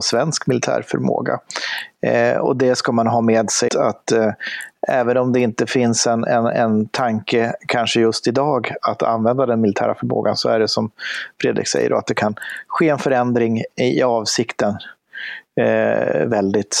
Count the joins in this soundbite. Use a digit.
1